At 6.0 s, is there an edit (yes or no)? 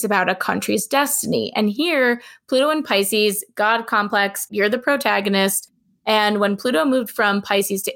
no